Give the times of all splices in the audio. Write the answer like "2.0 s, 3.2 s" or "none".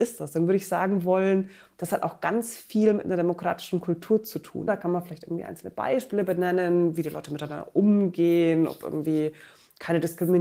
4.7 s